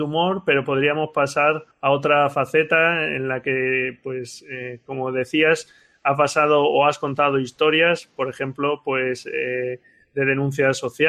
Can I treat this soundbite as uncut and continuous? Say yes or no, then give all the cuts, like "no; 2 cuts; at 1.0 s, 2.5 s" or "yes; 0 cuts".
no; 1 cut; at 1.7 s